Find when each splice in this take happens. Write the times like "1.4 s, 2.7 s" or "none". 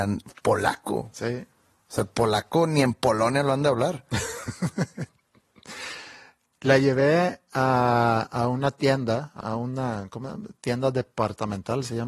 9.4 s